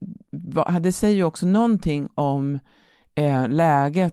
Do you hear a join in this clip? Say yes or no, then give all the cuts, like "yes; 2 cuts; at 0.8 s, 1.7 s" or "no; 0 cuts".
no; 0 cuts